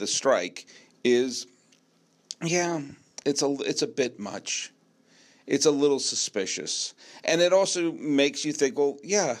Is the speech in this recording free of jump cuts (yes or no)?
yes